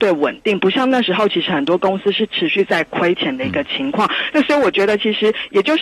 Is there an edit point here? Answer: yes; 1 cut; at 4.3 s

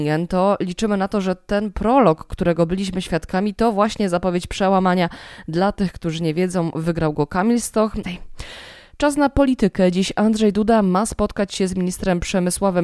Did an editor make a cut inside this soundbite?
yes; 1 cut; at 8.0 s

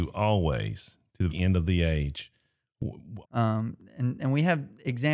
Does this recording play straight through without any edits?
no; 2 cuts; at 1.3 s, 3.2 s

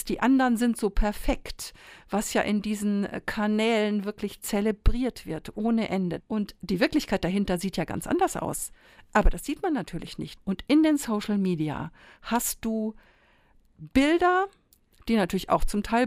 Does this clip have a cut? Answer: yes; 2 cuts; at 6.2 s, 10.4 s

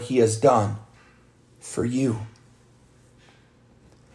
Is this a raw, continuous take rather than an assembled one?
yes; 0 cuts

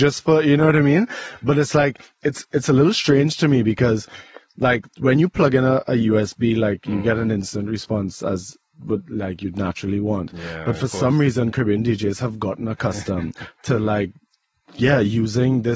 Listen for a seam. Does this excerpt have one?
no; 0 cuts

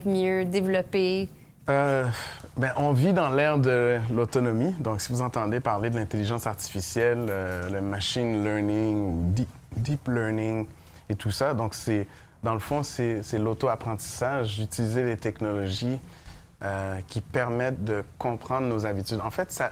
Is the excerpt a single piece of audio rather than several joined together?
no; 1 cut; at 1.7 s

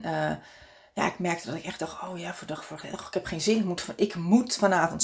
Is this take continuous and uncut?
yes; 0 cuts

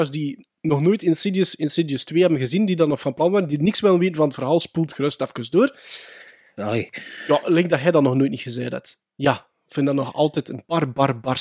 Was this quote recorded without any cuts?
no; 2 cuts; at 6.6 s, 9.0 s

